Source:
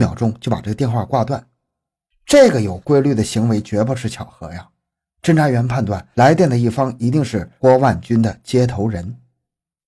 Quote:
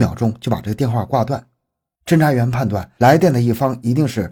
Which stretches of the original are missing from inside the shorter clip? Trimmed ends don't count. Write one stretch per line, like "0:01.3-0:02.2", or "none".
0:02.0-0:05.1